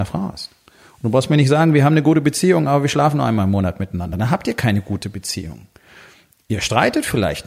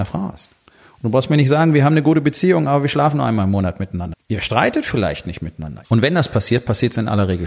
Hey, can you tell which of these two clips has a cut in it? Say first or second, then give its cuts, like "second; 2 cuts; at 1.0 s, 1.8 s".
second; 2 cuts; at 4.1 s, 5.8 s